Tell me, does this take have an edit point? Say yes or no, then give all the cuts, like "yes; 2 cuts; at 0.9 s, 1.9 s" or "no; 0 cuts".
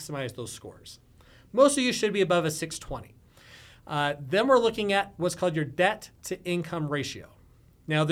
no; 0 cuts